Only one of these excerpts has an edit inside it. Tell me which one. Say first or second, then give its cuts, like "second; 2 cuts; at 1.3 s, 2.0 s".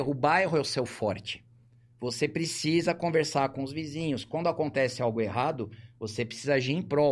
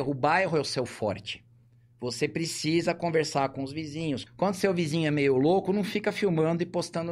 second; 1 cut; at 4.3 s